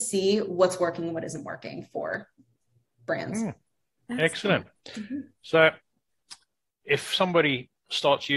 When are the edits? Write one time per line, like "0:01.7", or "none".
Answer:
none